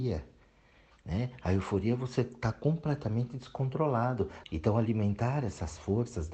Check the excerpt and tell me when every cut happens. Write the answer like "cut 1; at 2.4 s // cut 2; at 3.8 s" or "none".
cut 1; at 4.4 s